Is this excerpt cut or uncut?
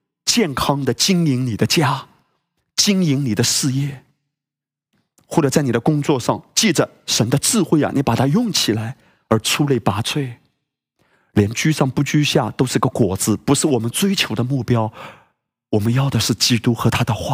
uncut